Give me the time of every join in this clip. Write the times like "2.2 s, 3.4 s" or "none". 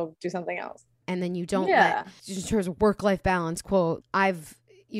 1.0 s, 2.2 s, 4.0 s